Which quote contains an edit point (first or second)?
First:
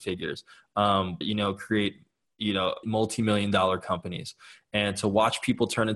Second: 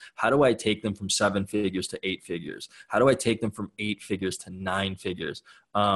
first